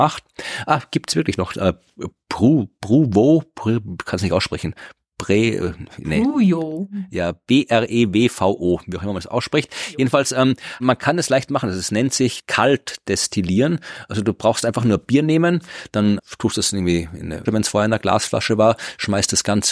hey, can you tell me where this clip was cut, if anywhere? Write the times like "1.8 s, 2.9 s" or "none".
10.8 s, 17.5 s